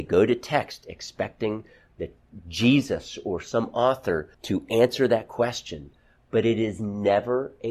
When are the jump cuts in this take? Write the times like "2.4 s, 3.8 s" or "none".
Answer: 4.3 s